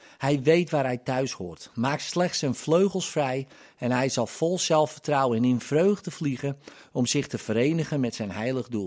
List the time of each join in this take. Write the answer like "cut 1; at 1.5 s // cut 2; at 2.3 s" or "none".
none